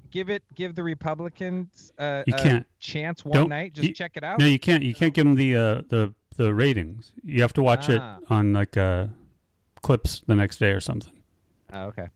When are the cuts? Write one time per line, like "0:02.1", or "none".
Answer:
none